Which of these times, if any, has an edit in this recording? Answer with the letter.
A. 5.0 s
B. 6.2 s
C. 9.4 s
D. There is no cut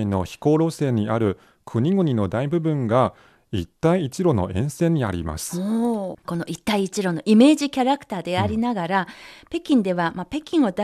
B